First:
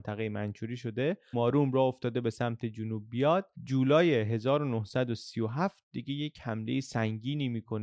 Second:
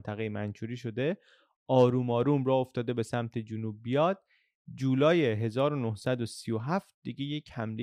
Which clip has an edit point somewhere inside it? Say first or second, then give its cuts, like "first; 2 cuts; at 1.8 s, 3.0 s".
first; 2 cuts; at 1.3 s, 3.5 s